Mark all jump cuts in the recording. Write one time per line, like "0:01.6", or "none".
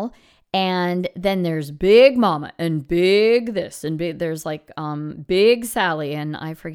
none